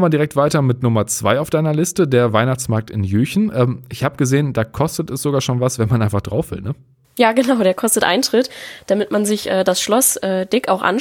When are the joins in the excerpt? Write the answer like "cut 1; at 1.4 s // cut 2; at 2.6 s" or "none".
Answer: none